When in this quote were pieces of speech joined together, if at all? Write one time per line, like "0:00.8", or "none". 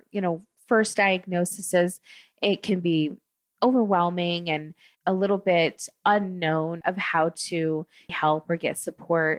0:06.8
0:08.1